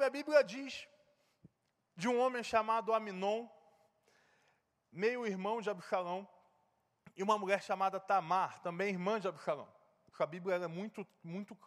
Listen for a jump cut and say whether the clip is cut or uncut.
cut